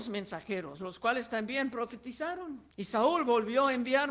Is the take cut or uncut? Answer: cut